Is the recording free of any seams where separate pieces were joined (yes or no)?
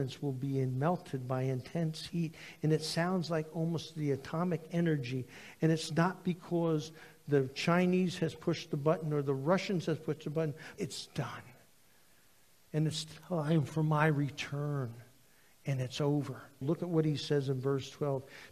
no